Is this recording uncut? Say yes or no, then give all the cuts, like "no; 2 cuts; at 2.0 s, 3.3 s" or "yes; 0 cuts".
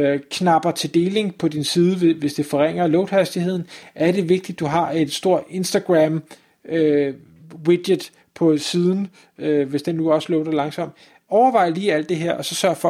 yes; 0 cuts